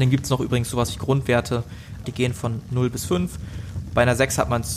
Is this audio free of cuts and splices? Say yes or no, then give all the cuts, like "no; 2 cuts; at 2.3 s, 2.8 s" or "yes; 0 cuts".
no; 1 cut; at 2.0 s